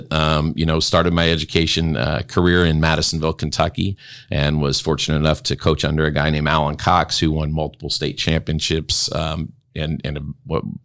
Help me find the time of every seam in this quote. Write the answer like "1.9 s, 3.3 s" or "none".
none